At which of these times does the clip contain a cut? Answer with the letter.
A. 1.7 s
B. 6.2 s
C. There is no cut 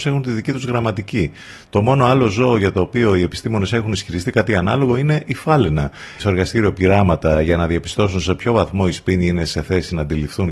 B